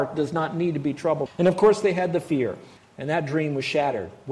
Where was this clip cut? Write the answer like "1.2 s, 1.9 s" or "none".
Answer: 1.3 s, 2.8 s